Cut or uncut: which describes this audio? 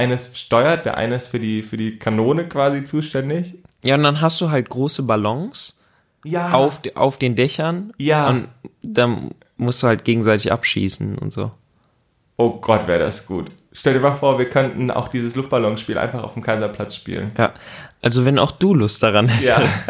uncut